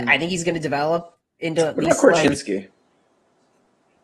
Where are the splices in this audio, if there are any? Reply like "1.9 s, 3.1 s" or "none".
none